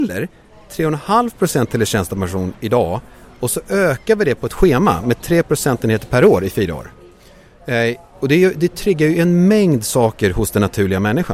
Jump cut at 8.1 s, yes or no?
no